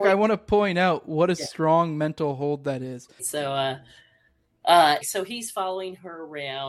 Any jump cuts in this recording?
yes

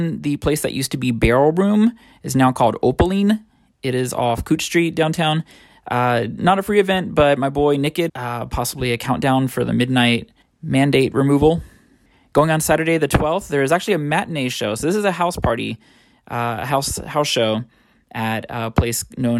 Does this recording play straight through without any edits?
no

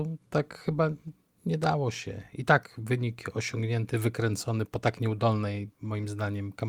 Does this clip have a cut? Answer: no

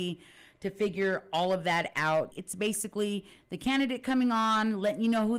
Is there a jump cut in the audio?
yes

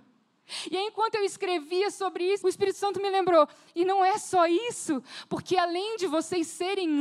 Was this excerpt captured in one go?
no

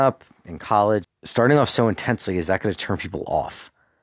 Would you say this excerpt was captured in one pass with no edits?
no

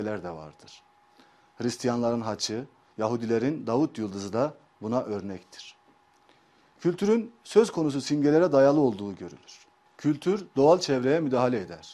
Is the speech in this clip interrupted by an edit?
yes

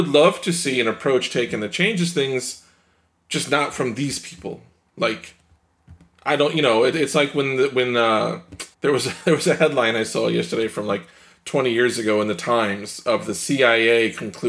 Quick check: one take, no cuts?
no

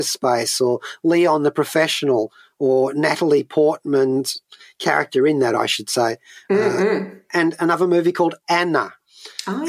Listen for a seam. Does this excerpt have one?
no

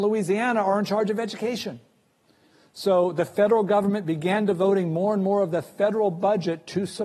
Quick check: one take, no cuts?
yes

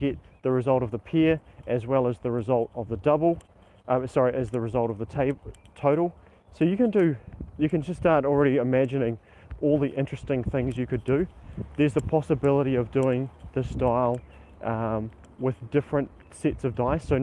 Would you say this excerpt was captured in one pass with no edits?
yes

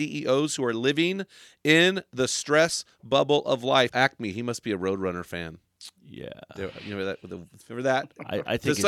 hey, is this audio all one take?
no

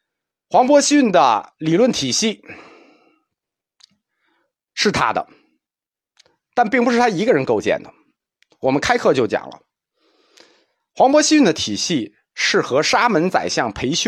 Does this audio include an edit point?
no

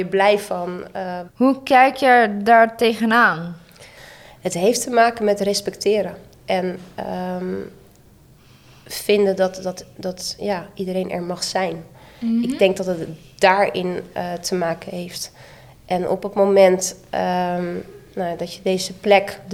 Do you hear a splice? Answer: yes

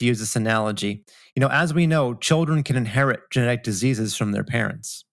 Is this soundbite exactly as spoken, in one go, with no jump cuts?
yes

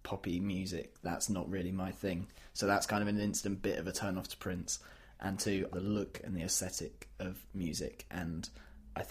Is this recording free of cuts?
no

